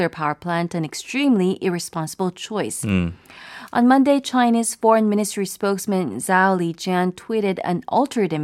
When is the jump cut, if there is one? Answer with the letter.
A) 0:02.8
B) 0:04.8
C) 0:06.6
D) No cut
D